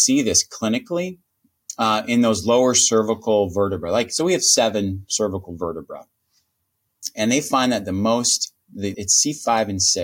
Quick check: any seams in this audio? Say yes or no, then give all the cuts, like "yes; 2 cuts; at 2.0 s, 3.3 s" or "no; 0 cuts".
yes; 1 cut; at 8.9 s